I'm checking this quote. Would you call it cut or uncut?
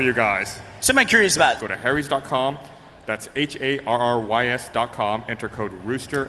cut